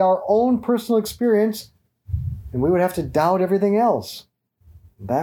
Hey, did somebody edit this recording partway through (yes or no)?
no